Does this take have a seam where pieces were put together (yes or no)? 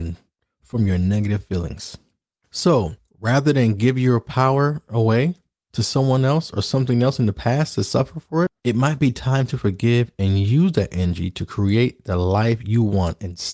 yes